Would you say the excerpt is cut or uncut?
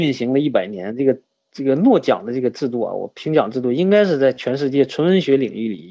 uncut